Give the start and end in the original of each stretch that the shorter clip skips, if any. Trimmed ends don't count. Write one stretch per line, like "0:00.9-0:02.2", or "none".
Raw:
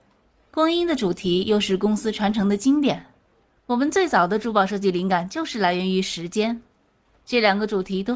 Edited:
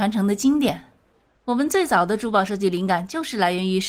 none